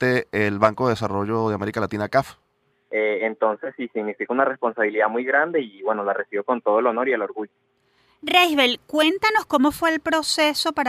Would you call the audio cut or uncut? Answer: cut